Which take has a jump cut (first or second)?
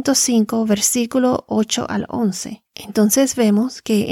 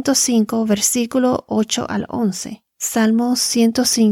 first